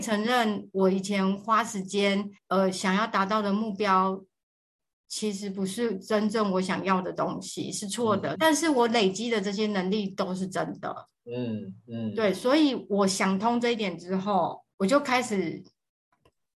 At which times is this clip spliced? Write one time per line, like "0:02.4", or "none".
0:02.4
0:08.4
0:14.7